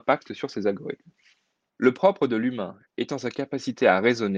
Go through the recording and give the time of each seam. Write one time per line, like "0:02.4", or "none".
0:01.7